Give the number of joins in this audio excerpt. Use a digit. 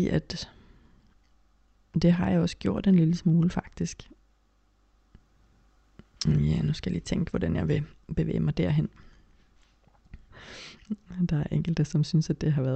1